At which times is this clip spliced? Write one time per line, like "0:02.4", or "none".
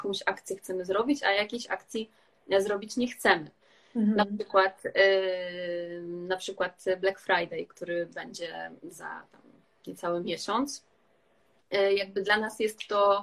none